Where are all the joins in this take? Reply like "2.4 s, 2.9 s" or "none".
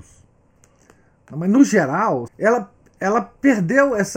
2.3 s